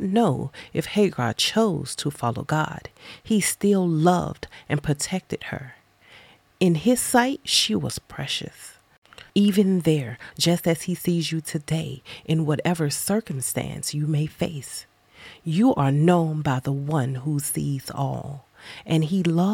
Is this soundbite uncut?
no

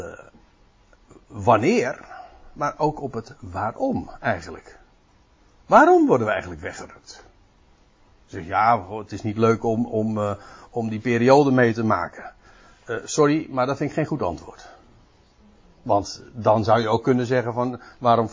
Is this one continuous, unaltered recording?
yes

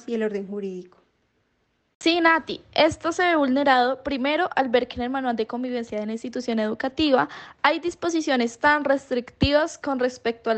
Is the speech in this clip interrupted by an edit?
no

